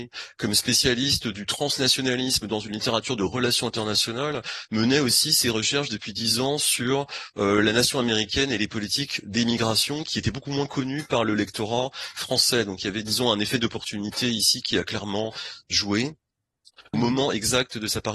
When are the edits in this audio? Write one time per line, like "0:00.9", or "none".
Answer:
0:16.9